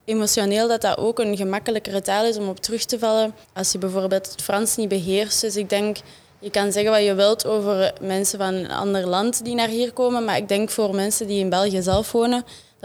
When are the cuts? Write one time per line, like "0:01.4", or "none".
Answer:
0:03.4